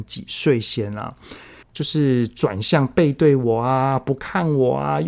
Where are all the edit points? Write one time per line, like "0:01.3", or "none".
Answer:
0:01.6